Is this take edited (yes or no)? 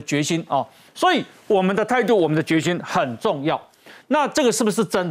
yes